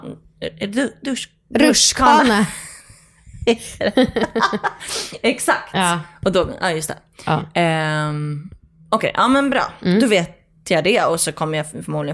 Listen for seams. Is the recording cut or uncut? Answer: uncut